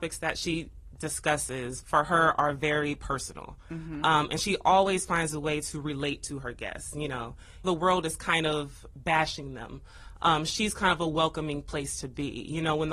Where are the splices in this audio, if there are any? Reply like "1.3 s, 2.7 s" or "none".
7.6 s